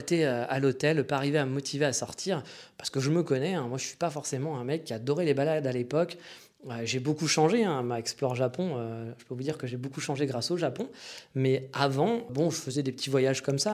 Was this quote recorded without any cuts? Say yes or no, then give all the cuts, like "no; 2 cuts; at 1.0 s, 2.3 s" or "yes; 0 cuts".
no; 1 cut; at 12.3 s